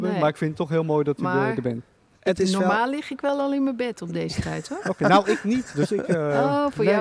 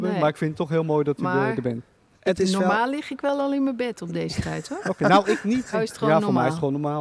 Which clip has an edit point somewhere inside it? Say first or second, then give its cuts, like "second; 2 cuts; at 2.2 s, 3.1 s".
second; 1 cut; at 5.7 s